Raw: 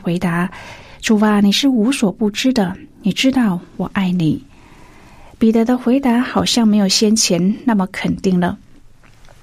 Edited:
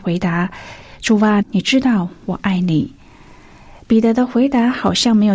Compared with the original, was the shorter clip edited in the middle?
yes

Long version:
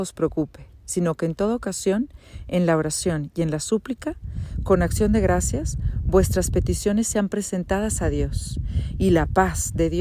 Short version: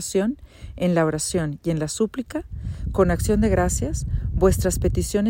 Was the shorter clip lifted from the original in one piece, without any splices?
yes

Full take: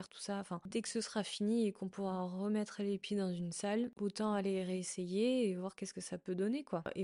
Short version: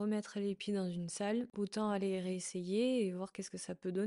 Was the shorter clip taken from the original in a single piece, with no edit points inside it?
yes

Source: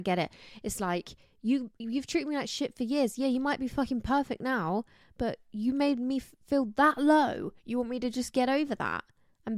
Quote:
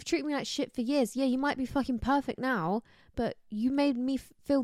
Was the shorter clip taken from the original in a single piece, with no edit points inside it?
yes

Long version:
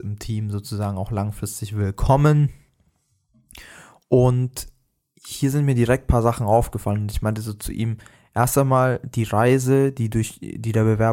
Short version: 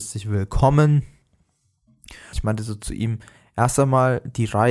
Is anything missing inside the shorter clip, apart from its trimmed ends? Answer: yes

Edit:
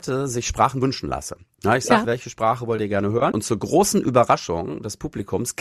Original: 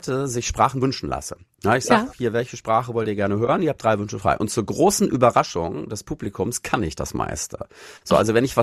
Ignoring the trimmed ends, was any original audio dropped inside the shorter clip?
yes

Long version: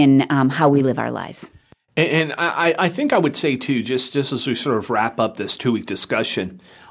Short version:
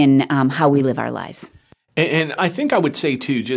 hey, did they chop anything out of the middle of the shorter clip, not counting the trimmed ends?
yes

